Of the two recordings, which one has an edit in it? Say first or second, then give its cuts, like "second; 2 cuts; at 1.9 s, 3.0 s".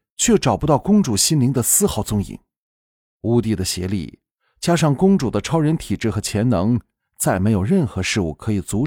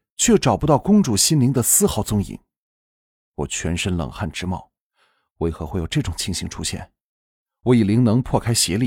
first; 1 cut; at 3.0 s